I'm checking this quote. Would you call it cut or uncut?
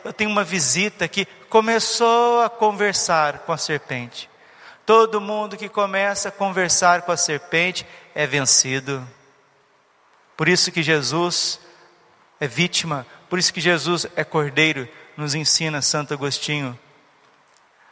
uncut